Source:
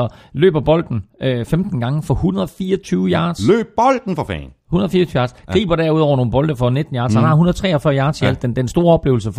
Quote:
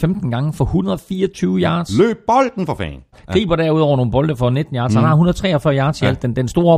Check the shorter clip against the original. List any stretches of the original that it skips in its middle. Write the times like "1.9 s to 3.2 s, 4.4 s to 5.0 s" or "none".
4.6 s to 5.3 s